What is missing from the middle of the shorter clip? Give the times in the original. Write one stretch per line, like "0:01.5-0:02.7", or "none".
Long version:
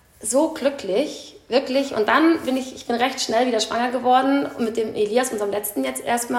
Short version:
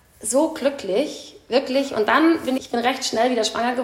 0:02.6-0:02.7